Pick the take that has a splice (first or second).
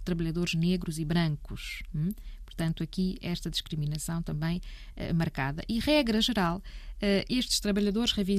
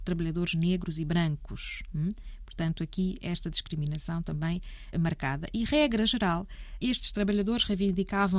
second